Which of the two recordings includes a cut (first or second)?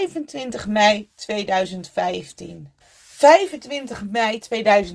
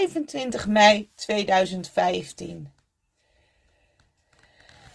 first